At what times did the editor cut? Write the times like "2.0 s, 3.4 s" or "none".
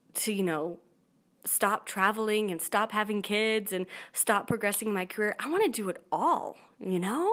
none